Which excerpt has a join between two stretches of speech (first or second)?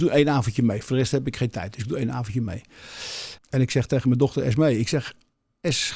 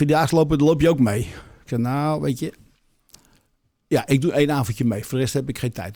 first